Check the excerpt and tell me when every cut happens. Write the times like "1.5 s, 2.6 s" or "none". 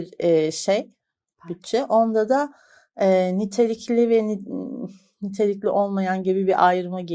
none